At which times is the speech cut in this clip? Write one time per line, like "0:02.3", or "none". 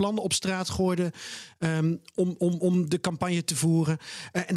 none

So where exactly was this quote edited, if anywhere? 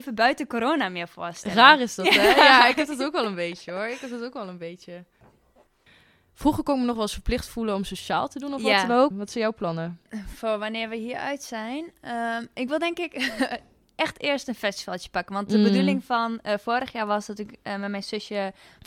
0:09.1

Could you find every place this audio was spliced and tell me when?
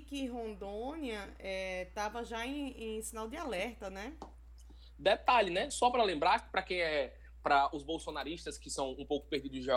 none

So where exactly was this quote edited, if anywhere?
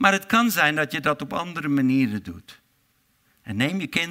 none

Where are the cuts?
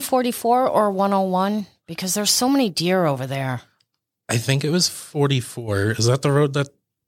none

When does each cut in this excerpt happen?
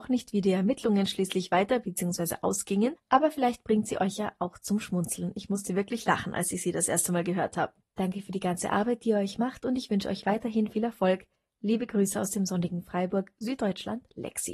0:07.8

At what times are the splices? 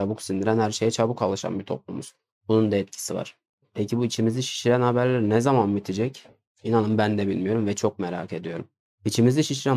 none

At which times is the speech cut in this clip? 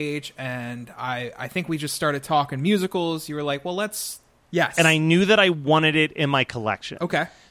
0:04.5

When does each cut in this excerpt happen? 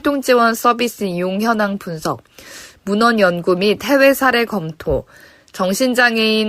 none

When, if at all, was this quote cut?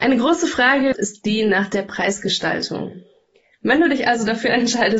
0:00.9
0:03.6

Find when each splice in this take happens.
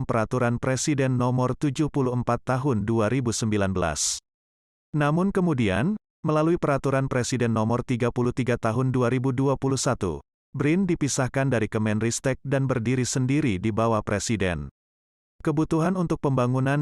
0:15.2

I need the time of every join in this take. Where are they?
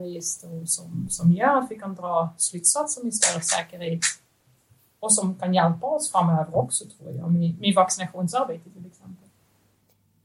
none

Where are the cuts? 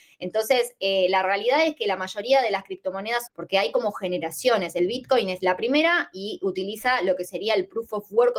0:03.3

